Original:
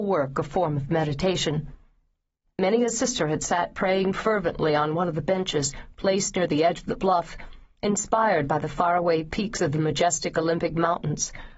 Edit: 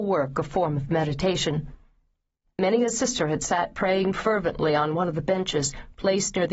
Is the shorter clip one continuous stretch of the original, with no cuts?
yes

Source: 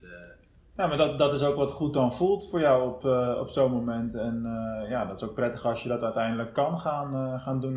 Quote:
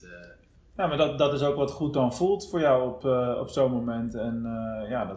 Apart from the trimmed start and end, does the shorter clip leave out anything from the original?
no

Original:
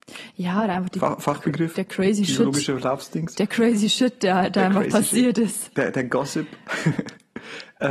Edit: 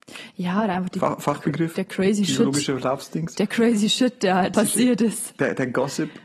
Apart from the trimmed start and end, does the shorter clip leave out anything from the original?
yes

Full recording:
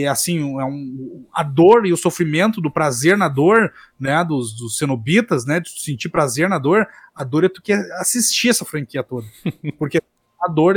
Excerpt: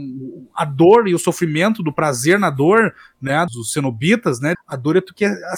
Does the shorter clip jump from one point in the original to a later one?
yes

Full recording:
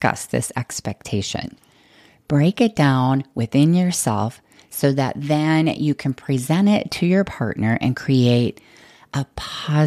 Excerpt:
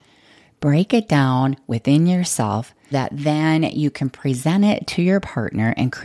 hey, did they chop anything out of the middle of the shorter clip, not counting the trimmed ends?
yes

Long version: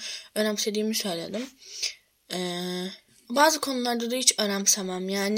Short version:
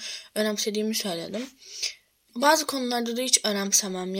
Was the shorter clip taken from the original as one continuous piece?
no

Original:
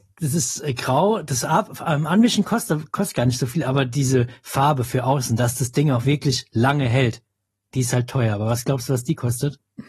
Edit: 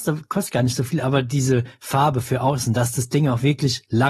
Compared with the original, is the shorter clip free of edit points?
yes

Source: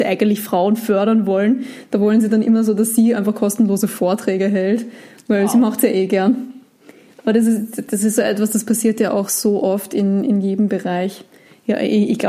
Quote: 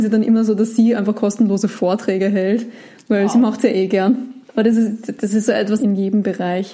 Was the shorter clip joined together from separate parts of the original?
yes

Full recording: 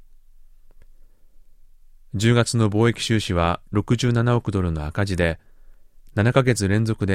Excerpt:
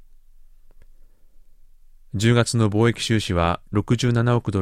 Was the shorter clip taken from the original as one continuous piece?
yes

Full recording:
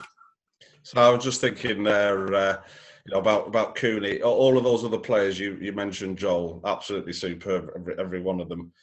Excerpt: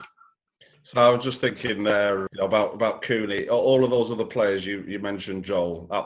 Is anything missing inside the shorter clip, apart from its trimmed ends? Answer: yes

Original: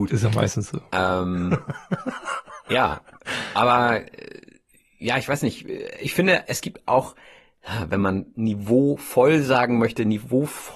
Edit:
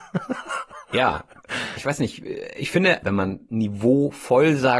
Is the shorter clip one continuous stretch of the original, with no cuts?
no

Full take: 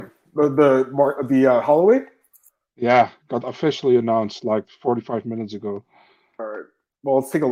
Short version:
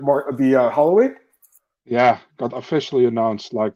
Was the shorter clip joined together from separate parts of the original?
no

